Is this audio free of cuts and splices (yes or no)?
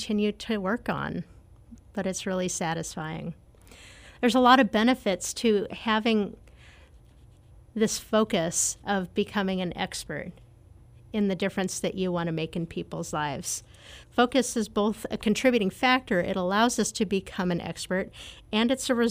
no